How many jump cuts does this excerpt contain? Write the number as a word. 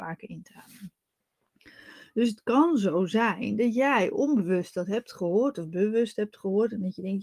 zero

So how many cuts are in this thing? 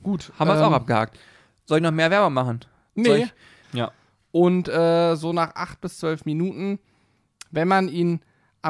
one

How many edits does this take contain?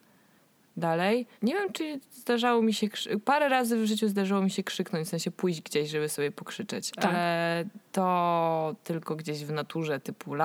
one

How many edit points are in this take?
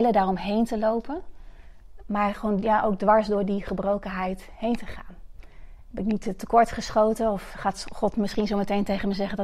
one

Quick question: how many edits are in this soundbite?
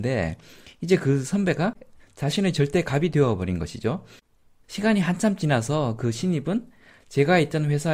one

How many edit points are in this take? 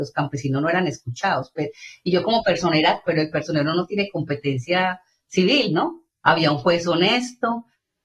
two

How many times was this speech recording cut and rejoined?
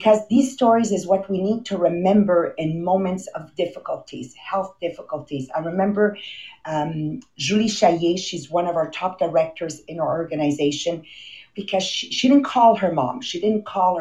one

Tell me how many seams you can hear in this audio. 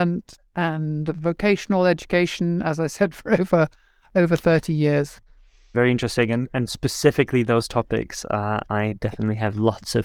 one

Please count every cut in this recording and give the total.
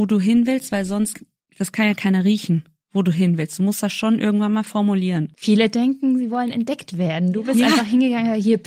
zero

